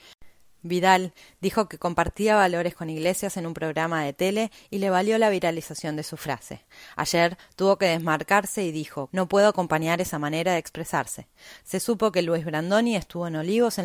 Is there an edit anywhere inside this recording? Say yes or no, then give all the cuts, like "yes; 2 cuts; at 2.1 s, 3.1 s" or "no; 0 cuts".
yes; 2 cuts; at 9.1 s, 11.6 s